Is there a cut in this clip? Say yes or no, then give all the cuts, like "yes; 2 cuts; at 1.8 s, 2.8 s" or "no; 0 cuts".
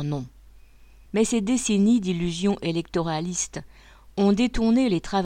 yes; 1 cut; at 1.1 s